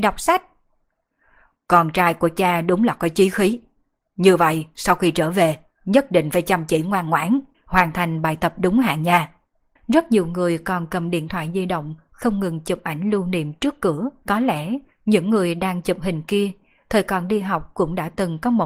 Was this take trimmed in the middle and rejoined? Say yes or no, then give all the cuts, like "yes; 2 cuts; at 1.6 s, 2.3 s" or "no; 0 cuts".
yes; 3 cuts; at 7.5 s, 9.8 s, 14.2 s